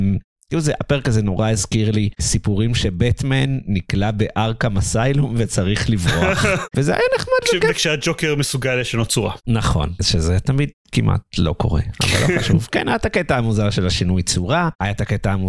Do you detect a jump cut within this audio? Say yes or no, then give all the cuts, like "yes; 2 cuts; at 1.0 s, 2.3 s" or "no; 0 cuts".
yes; 1 cut; at 6.7 s